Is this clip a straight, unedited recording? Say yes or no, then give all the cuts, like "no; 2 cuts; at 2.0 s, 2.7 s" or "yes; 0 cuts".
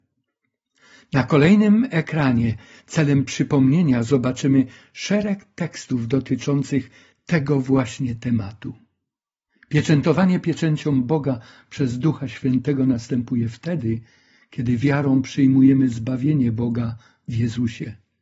yes; 0 cuts